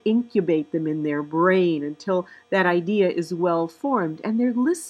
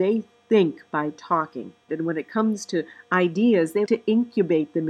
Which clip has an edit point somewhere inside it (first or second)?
second